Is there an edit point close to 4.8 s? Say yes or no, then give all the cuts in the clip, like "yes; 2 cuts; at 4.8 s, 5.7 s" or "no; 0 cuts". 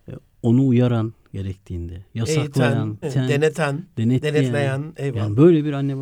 no; 1 cut; at 3.0 s